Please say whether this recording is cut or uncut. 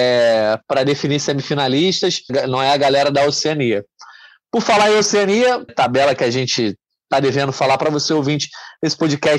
cut